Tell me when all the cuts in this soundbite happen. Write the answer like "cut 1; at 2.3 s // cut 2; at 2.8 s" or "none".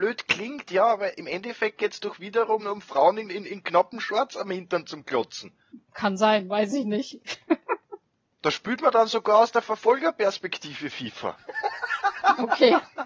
cut 1; at 2.6 s